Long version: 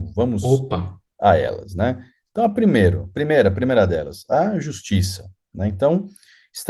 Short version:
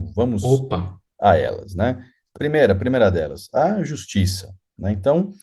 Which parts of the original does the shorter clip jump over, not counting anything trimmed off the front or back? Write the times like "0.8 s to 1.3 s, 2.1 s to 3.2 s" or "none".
2.4 s to 3.1 s